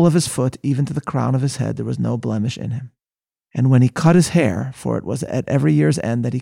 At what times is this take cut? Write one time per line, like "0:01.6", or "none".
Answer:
none